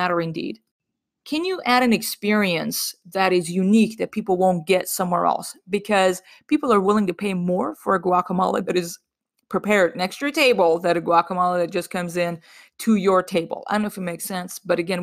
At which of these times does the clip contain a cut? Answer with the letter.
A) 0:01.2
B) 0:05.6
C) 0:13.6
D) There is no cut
A